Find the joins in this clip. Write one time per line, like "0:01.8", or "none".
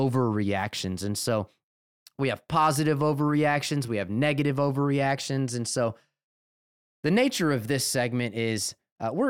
none